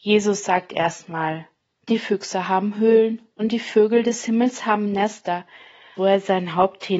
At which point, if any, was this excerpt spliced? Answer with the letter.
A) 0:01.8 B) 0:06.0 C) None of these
B